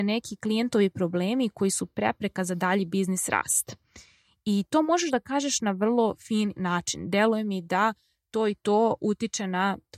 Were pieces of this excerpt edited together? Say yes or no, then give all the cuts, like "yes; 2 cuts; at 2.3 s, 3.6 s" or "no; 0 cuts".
no; 0 cuts